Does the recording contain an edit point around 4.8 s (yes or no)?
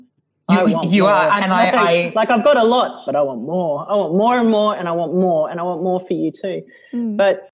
no